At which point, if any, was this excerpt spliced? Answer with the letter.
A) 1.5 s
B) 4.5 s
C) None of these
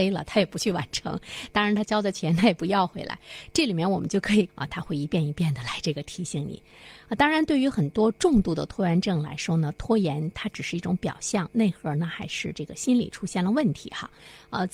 B